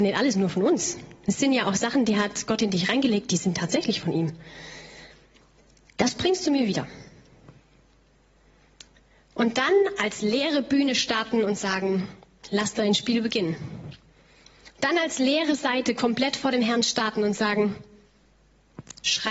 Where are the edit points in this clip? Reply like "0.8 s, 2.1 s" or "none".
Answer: none